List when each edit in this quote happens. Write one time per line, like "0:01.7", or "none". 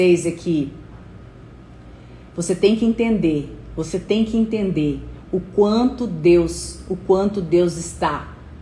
none